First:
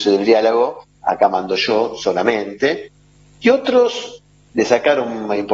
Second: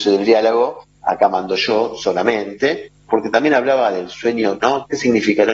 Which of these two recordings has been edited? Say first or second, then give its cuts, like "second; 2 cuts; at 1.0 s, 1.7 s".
second; 2 cuts; at 3.1 s, 4.6 s